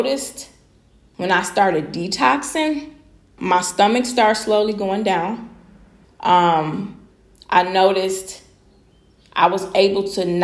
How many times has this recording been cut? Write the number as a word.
two